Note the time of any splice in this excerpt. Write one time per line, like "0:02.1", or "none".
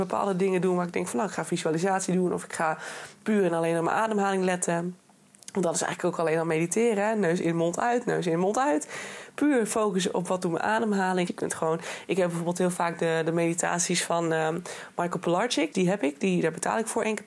0:11.3
0:15.7